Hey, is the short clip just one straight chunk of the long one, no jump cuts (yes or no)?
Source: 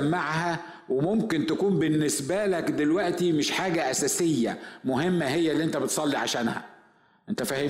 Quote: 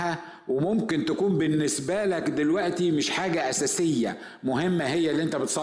yes